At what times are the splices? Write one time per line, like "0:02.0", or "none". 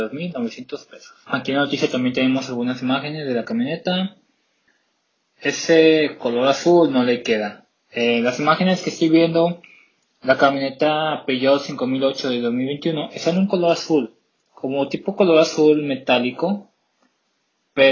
none